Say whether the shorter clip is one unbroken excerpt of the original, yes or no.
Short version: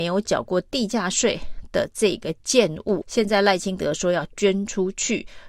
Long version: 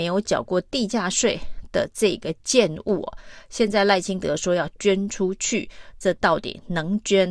no